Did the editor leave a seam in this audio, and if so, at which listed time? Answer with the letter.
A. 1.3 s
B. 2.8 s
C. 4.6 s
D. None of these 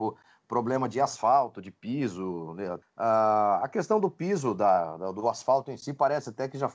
B